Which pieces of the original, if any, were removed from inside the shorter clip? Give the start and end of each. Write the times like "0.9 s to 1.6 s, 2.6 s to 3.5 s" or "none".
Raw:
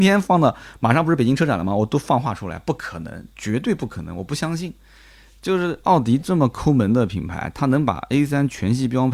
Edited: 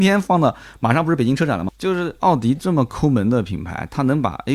1.7 s to 5.3 s

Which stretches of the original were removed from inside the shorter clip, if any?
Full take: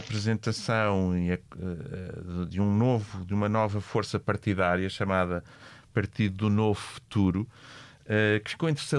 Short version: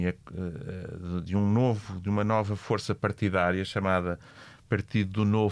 none

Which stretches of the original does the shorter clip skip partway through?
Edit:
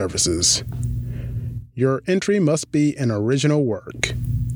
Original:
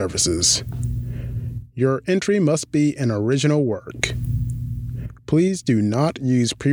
none

